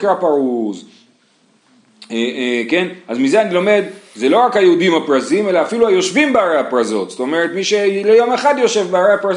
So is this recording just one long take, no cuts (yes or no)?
yes